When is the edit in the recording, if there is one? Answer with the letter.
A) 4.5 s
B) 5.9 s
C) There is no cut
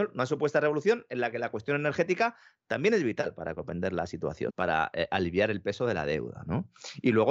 A